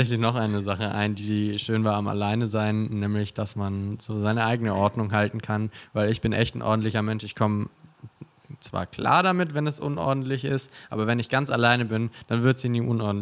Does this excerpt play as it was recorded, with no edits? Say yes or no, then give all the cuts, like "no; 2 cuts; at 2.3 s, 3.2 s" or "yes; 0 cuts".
yes; 0 cuts